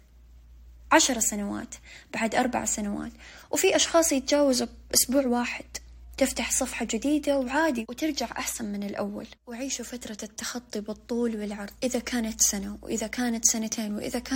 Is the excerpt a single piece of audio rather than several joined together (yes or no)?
no